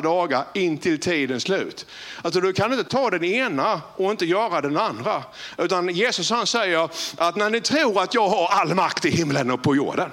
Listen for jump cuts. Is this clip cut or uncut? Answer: uncut